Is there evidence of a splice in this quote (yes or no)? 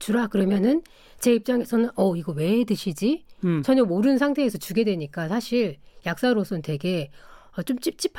no